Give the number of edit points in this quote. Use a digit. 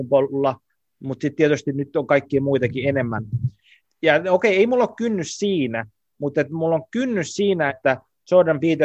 2